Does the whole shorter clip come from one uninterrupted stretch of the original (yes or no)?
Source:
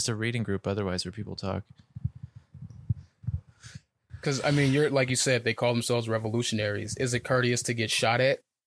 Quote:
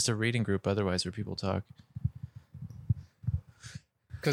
yes